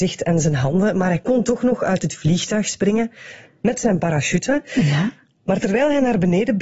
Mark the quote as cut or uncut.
uncut